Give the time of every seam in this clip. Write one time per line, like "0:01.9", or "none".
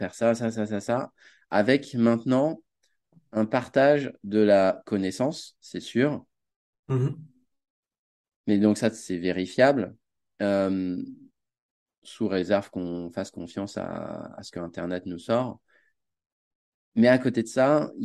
0:06.8